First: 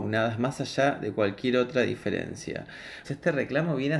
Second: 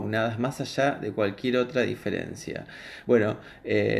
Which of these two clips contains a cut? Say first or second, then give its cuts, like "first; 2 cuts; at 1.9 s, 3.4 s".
first; 1 cut; at 3.0 s